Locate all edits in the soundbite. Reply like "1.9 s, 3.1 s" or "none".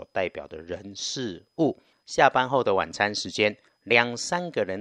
none